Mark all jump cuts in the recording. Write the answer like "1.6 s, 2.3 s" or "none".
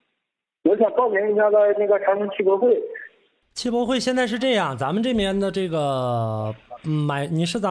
none